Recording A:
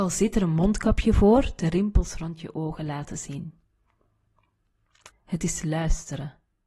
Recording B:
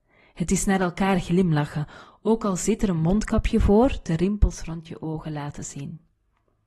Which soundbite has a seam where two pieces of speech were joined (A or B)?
A